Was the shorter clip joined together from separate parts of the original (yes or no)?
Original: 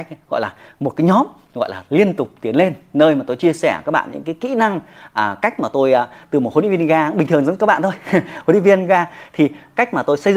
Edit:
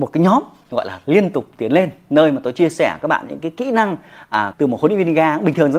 yes